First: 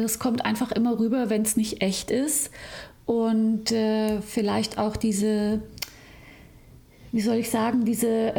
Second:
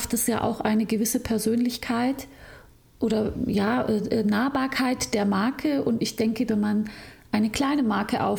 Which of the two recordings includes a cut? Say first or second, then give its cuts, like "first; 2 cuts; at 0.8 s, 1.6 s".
second; 1 cut; at 6.5 s